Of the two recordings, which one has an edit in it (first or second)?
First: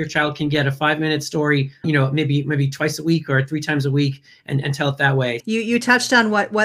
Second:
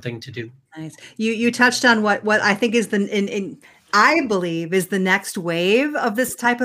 first